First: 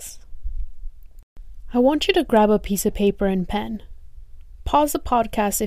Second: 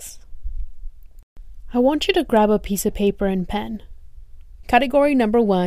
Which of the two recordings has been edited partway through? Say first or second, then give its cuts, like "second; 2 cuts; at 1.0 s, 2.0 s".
second; 1 cut; at 4.6 s